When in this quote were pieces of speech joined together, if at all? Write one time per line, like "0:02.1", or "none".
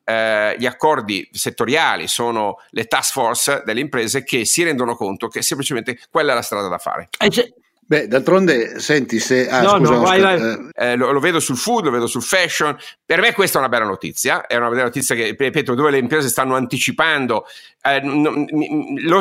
0:10.7
0:13.0